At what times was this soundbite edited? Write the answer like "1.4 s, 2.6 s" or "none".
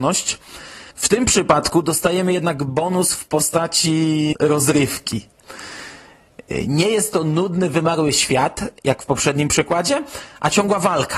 0.9 s, 4.3 s

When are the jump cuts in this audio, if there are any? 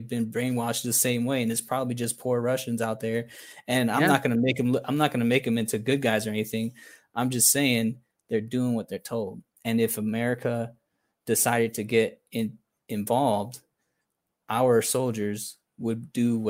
9.5 s

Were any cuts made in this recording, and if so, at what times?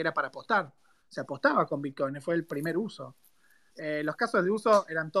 3.7 s

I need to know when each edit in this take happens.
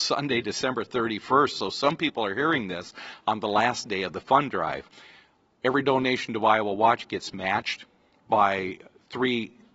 none

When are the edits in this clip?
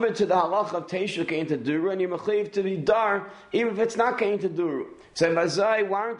none

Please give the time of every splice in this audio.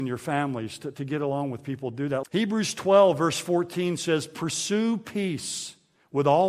2.2 s

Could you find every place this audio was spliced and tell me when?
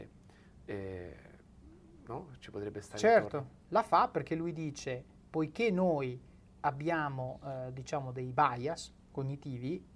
3.6 s

